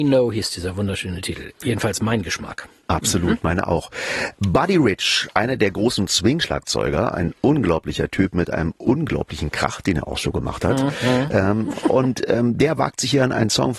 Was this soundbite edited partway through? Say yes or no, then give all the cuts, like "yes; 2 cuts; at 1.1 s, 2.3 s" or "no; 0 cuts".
no; 0 cuts